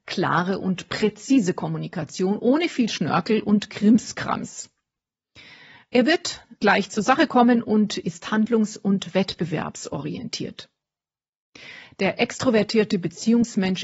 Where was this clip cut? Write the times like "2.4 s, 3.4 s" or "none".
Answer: none

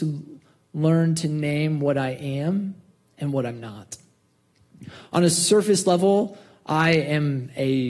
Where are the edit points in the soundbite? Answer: none

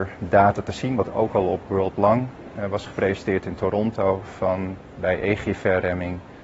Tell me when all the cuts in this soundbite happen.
none

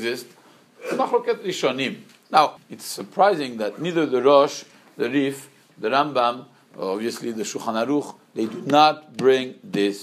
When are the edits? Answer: 2.6 s

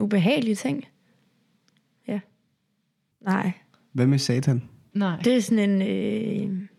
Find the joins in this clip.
3.1 s, 4.9 s

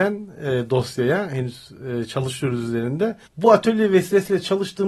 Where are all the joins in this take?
3.3 s

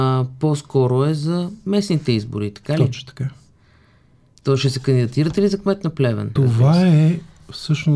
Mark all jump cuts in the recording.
6.4 s

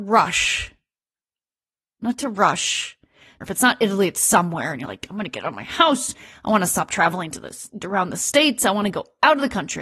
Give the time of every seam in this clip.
3.4 s

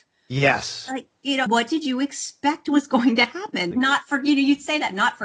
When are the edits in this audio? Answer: 1.5 s, 3.7 s

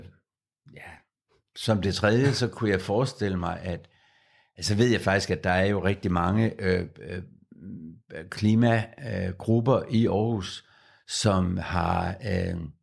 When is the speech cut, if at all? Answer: none

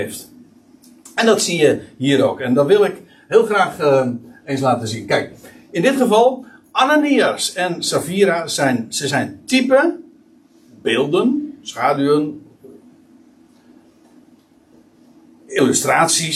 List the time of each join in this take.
none

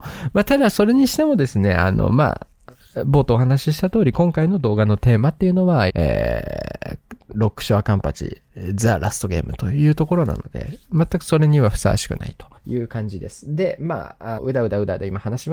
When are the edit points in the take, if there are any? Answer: 5.9 s, 12.6 s, 14.4 s

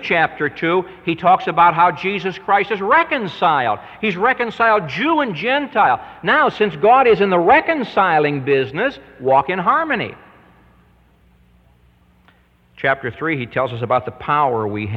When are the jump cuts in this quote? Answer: none

